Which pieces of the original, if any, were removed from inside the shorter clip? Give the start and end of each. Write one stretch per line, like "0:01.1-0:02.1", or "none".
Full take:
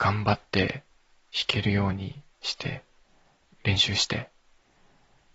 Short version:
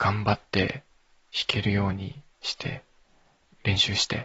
none